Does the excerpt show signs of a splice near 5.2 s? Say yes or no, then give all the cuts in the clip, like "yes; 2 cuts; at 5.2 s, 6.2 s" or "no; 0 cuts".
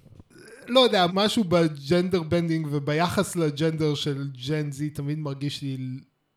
no; 1 cut; at 1.1 s